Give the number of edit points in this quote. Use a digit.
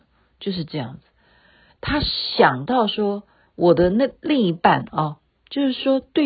2